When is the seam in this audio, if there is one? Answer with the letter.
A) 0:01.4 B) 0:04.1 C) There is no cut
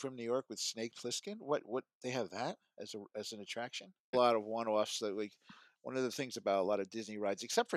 B